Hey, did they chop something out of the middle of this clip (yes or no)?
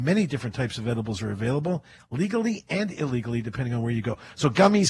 no